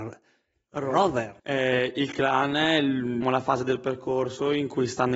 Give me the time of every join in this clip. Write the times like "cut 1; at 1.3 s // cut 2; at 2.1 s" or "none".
cut 1; at 1.4 s // cut 2; at 3.2 s